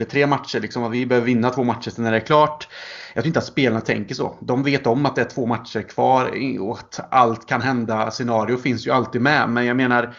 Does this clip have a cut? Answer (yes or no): no